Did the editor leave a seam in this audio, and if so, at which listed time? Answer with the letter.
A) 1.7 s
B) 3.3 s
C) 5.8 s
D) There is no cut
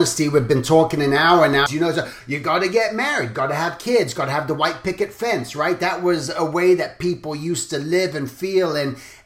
A